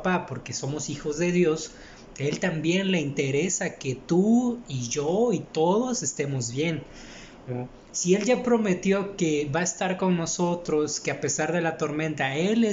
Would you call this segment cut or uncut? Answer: uncut